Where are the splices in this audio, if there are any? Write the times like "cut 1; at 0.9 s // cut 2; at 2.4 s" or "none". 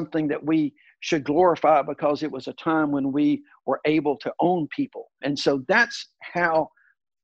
cut 1; at 5.2 s

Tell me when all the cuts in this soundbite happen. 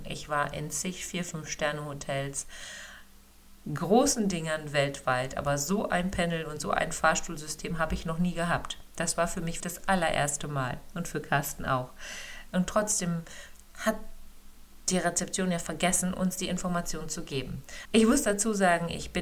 cut 1; at 9.6 s // cut 2; at 12.5 s // cut 3; at 17.9 s

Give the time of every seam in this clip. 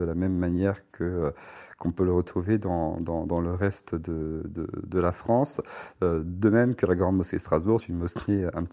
none

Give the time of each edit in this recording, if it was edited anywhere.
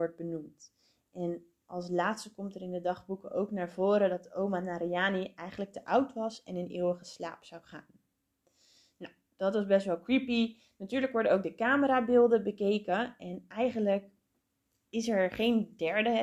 none

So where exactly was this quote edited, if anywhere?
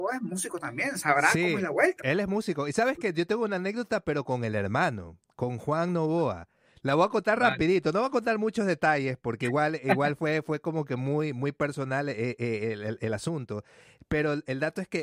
none

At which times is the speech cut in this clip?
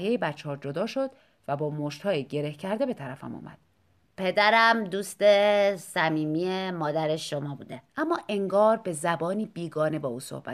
cut 1; at 4.0 s // cut 2; at 7.9 s

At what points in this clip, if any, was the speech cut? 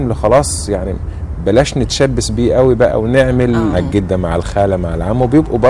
cut 1; at 3.7 s

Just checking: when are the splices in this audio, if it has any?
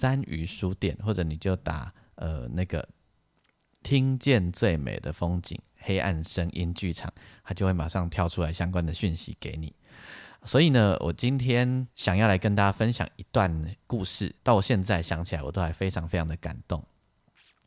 cut 1; at 11.9 s // cut 2; at 14.4 s

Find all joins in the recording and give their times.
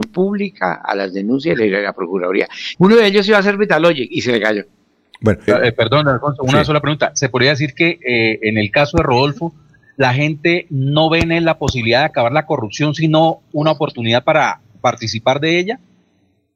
cut 1; at 2.7 s // cut 2; at 5.5 s

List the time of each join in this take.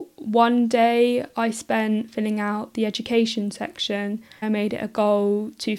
cut 1; at 4.4 s

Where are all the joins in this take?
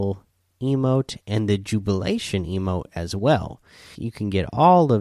cut 1; at 4.0 s

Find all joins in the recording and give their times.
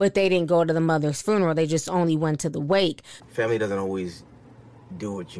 cut 1; at 3.2 s

